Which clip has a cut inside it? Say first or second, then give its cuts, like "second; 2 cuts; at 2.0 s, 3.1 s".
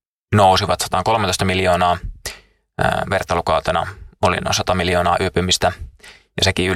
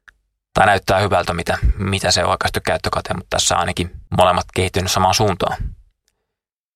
second; 2 cuts; at 1.3 s, 4.1 s